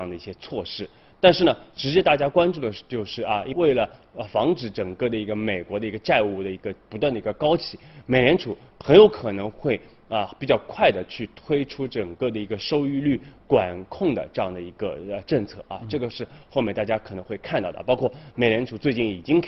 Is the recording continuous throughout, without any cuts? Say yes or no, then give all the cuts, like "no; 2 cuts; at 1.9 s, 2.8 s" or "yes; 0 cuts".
no; 1 cut; at 3.5 s